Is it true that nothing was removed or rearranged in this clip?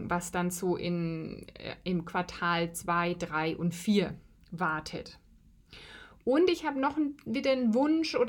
yes; 0 cuts

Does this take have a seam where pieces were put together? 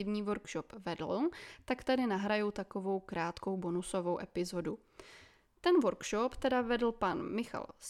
no; 0 cuts

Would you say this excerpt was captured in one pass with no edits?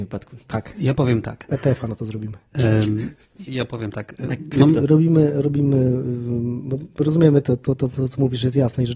no; 2 cuts; at 3.5 s, 4.8 s

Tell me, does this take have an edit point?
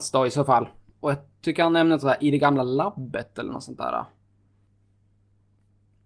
yes; 1 cut; at 0.9 s

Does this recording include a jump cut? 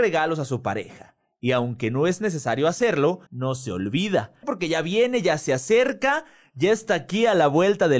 yes; 2 cuts; at 3.3 s, 4.4 s

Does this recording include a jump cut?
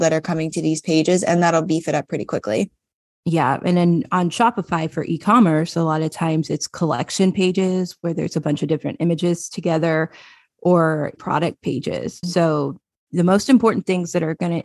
yes; 2 cuts; at 11.2 s, 12.2 s

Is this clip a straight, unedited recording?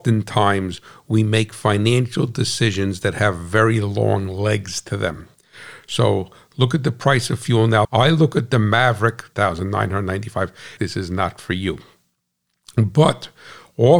no; 3 cuts; at 7.8 s, 9.3 s, 10.8 s

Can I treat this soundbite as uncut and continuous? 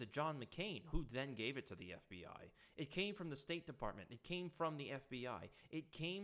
yes; 0 cuts

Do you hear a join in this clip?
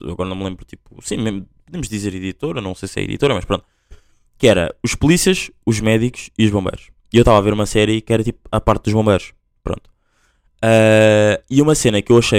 no; 0 cuts

